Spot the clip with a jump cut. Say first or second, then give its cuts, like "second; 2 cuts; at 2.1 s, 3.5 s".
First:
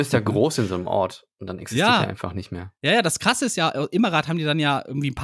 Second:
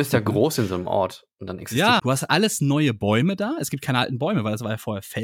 second; 1 cut; at 2.0 s